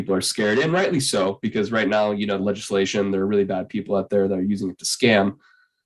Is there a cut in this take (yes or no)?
yes